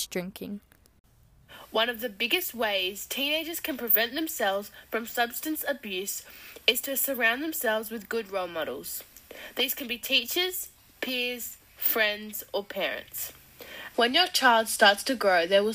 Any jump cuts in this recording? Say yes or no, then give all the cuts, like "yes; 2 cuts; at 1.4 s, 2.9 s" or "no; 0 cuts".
yes; 1 cut; at 13.9 s